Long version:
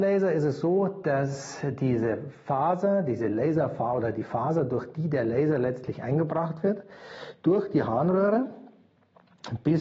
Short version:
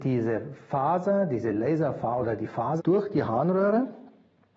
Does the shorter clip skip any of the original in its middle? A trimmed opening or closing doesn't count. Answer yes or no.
yes